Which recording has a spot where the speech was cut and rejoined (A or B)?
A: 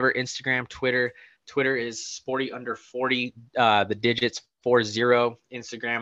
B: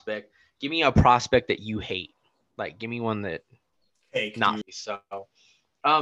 B